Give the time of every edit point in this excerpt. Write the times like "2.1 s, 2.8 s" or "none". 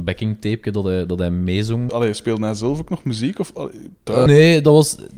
1.9 s, 4.3 s